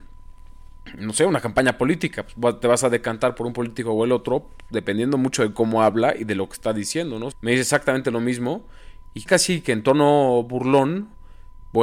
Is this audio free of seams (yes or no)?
no